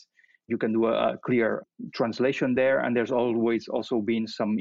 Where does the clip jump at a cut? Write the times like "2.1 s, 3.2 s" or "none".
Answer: none